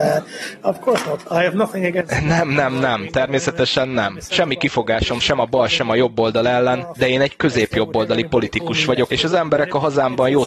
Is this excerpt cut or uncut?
uncut